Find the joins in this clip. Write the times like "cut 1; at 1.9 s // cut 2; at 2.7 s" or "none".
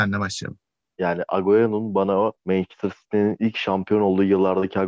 cut 1; at 0.9 s // cut 2; at 2.4 s